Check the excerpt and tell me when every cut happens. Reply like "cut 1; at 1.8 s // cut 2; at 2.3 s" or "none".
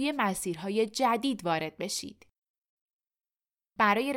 none